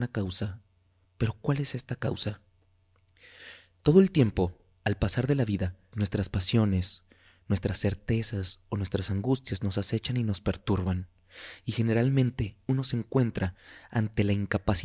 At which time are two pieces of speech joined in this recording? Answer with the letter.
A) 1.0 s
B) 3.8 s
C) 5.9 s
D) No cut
C